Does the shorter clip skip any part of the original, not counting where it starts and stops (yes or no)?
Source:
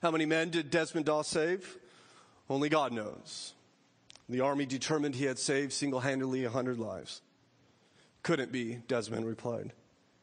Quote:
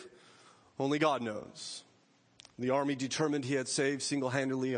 no